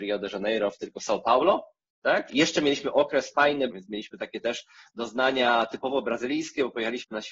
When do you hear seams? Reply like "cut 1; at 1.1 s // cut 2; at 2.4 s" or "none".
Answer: cut 1; at 2.3 s // cut 2; at 3.7 s